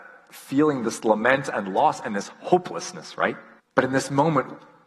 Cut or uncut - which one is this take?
cut